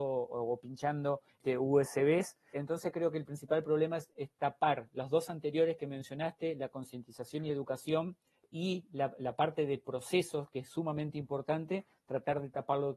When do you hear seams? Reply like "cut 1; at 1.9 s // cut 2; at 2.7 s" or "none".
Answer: none